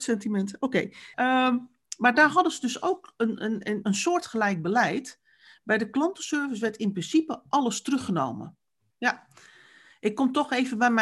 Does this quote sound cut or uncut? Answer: cut